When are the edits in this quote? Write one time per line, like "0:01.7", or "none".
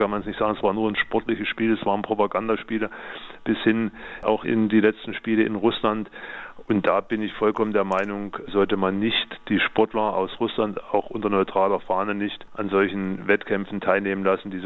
0:06.6

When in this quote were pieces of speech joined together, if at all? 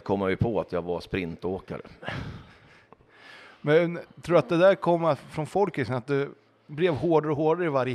none

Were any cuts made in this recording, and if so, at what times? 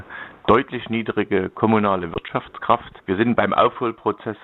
0:03.0

